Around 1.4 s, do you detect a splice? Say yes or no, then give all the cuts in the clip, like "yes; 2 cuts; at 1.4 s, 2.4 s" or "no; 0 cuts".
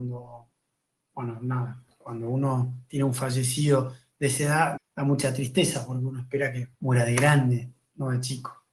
no; 2 cuts; at 4.8 s, 6.7 s